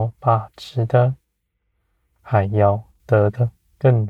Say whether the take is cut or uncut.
uncut